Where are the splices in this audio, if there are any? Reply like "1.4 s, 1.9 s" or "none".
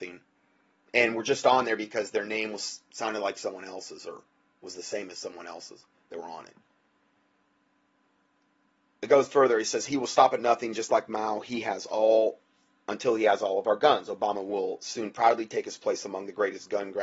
none